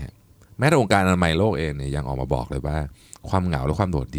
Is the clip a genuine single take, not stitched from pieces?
yes; 0 cuts

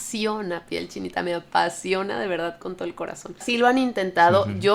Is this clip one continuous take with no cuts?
no; 1 cut; at 3.4 s

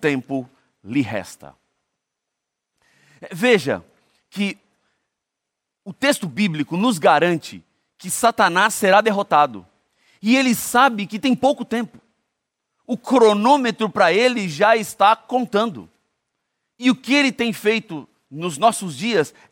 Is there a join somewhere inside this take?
no; 0 cuts

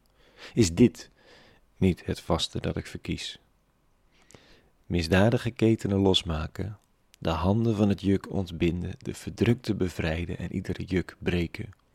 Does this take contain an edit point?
no; 0 cuts

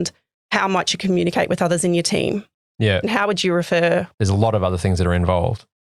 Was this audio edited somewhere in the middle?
yes; 2 cuts; at 3.0 s, 4.1 s

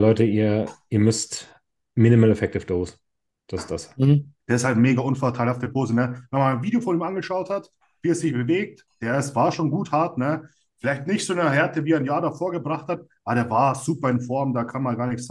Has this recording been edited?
yes; 1 cut; at 4.4 s

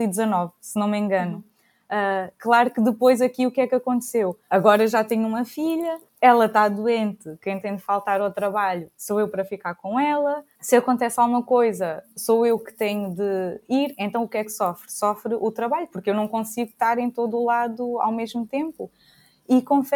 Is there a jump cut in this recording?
no; 0 cuts

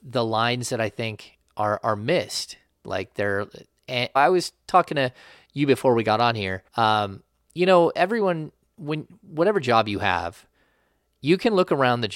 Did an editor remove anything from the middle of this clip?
yes; 2 cuts; at 4.2 s, 6.7 s

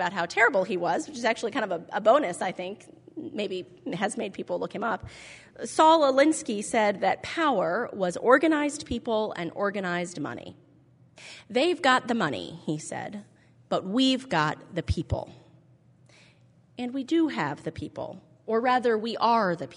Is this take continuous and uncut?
yes; 0 cuts

